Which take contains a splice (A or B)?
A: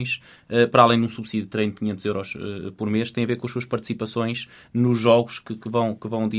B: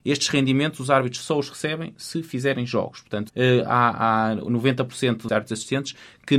B